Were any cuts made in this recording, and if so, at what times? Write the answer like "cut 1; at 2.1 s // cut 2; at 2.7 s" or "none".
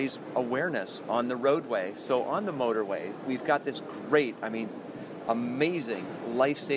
none